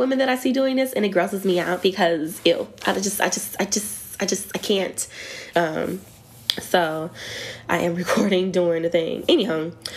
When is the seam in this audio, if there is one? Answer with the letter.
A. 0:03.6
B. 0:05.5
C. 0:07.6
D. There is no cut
B